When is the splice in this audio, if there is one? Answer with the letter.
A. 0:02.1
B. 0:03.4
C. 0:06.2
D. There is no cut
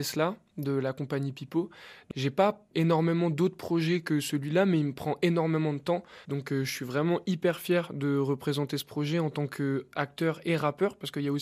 C